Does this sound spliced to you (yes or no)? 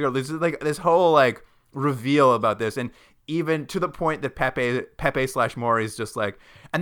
no